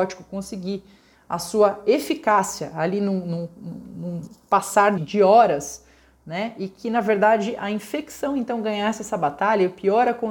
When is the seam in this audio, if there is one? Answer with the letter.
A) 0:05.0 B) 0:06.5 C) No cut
A